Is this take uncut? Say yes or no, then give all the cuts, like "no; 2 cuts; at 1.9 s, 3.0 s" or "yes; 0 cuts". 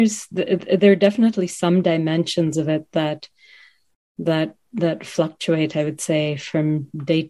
yes; 0 cuts